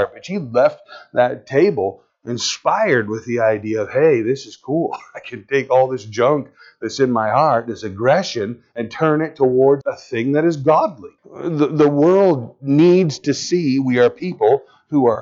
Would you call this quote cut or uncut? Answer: cut